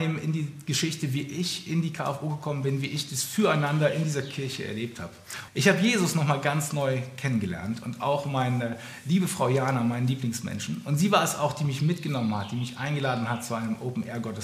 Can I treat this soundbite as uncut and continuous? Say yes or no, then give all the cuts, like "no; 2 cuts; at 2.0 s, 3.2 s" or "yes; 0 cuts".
no; 1 cut; at 5.5 s